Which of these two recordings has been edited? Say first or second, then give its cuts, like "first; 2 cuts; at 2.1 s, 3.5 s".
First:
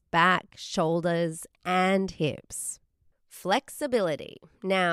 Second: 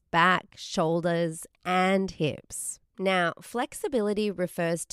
second; 1 cut; at 2.9 s